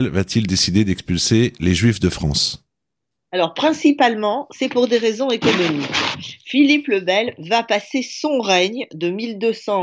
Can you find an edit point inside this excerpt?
no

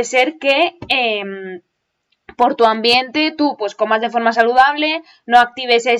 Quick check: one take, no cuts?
yes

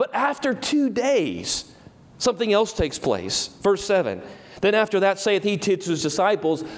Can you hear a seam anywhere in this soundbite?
no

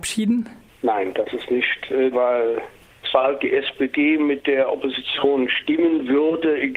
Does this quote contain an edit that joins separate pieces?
yes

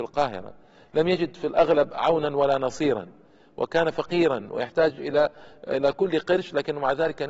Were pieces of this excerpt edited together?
no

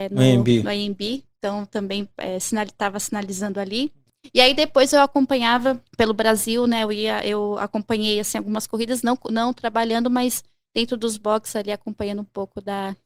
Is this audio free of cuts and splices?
no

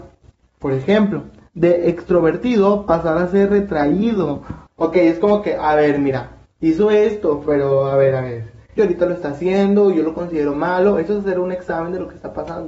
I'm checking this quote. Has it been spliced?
yes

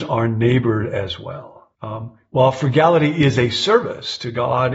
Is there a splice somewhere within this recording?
yes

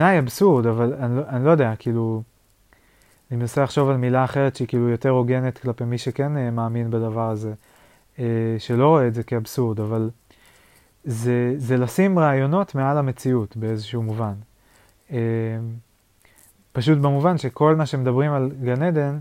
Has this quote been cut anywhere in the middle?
no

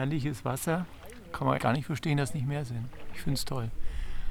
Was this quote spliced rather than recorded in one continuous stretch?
yes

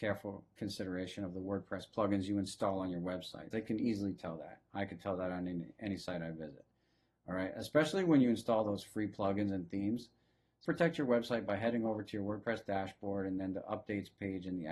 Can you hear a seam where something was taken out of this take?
yes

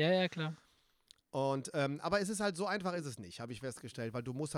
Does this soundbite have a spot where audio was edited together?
no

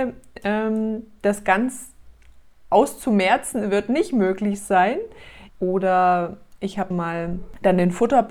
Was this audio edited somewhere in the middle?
yes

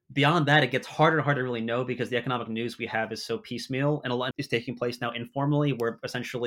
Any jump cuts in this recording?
yes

